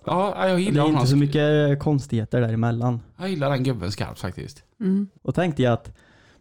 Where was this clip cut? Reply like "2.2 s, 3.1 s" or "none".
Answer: 5.2 s